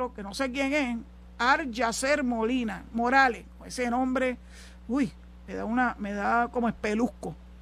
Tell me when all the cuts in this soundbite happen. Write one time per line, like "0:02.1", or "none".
none